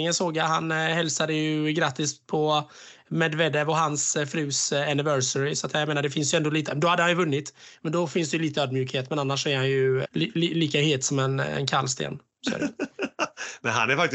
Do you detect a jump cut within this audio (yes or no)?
yes